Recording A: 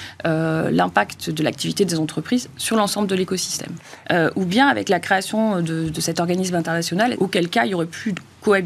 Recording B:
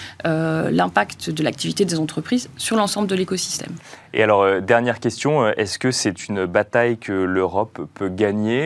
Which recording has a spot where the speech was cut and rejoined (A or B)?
A